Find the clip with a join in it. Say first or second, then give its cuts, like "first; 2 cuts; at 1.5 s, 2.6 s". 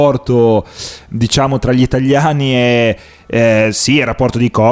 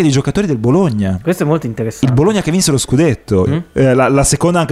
second; 1 cut; at 3.5 s